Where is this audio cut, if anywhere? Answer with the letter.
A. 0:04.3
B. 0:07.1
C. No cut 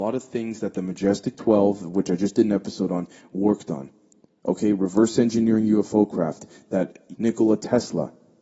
B